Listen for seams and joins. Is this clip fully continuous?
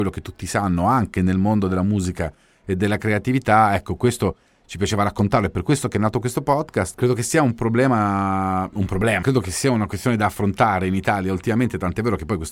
no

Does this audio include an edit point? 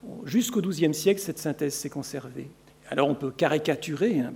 yes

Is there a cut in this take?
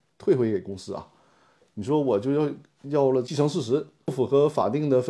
no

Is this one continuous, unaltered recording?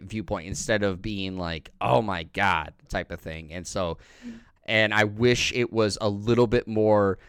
no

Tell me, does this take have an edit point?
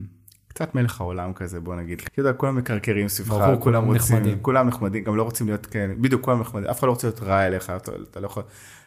yes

